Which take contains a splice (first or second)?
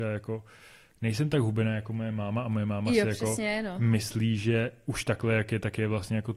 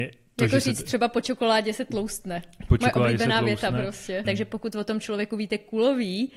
second